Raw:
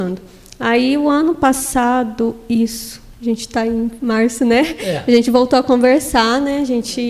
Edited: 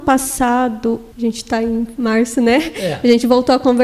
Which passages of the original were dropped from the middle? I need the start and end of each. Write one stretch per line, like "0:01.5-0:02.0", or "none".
0:02.5-0:03.1